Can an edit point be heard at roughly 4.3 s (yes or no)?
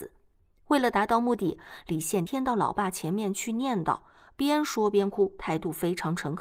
no